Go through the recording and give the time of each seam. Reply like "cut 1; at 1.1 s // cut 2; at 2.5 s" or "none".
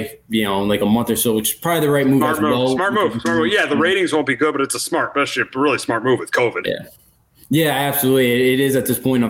none

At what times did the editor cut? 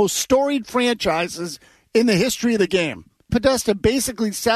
cut 1; at 3.3 s

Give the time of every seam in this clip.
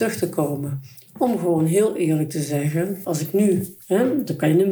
cut 1; at 3.0 s

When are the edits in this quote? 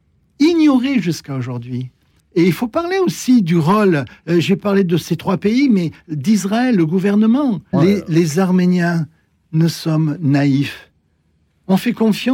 cut 1; at 2.2 s // cut 2; at 7.7 s

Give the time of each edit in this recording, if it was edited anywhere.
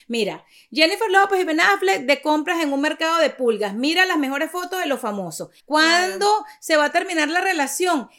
cut 1; at 5.6 s

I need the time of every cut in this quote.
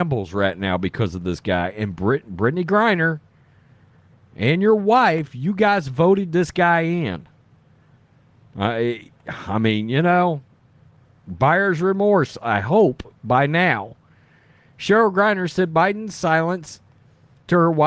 none

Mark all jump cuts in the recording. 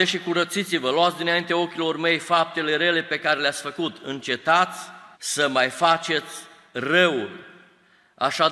cut 1; at 5.1 s

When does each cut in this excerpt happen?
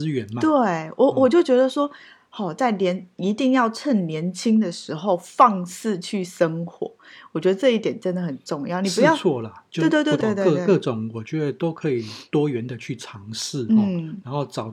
cut 1; at 10.2 s

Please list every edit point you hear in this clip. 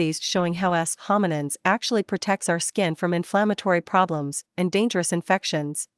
cut 1; at 4.5 s

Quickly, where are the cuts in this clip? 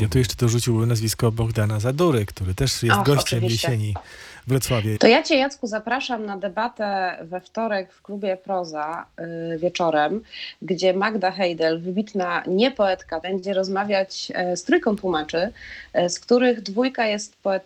cut 1; at 5.0 s // cut 2; at 13.2 s

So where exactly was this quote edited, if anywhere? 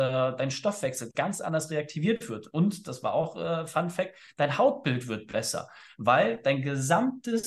none

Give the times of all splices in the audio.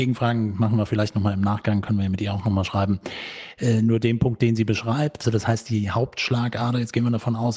cut 1; at 5.2 s

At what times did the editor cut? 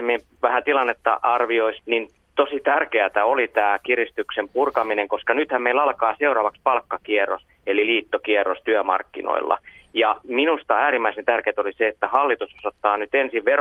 cut 1; at 1.8 s // cut 2; at 7.5 s

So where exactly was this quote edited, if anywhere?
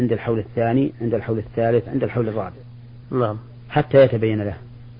cut 1; at 3.0 s

